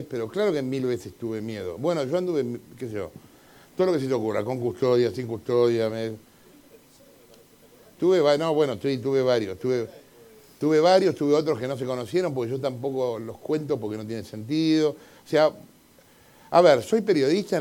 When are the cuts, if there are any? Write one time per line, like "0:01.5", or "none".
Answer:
none